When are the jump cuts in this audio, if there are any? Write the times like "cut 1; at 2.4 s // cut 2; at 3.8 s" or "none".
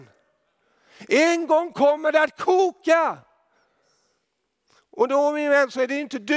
none